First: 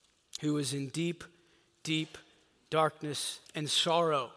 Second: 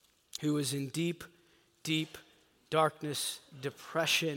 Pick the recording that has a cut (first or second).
first